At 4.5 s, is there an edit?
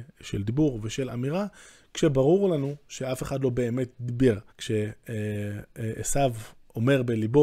yes; 1 cut; at 4.5 s

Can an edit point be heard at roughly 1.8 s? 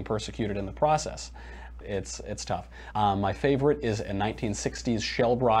yes; 2 cuts; at 1.8 s, 2.9 s

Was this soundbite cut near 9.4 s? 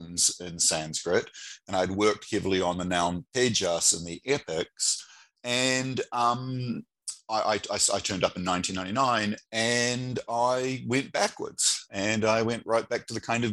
yes; 2 cuts; at 5.3 s, 9.4 s

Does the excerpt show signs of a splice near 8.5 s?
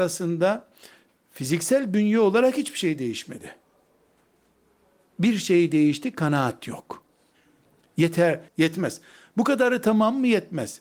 yes; 1 cut; at 8.5 s

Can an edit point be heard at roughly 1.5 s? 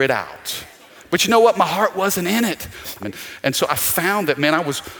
no; 1 cut; at 3.0 s

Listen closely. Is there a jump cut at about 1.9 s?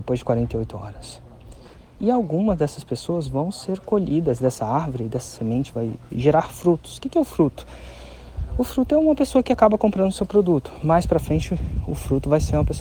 yes; 1 cut; at 1.9 s

